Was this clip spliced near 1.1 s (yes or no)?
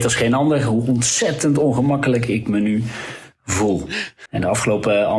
no